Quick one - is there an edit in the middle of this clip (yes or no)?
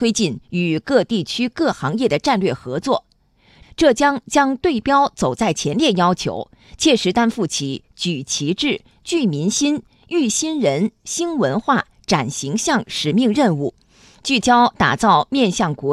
yes